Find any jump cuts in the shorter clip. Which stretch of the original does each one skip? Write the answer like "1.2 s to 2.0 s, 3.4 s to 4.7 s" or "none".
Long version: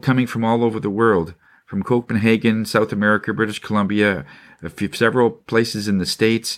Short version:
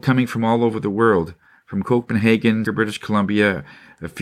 2.7 s to 3.3 s